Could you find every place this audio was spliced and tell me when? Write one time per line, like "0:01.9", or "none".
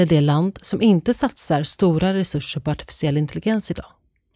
none